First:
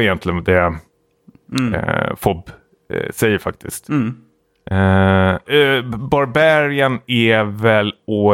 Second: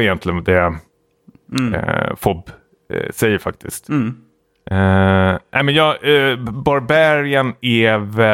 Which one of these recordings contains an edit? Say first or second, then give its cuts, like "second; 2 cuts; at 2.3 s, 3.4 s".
first; 1 cut; at 5.5 s